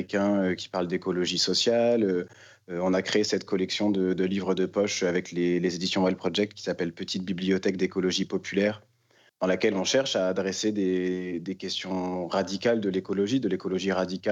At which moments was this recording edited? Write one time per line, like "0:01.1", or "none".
none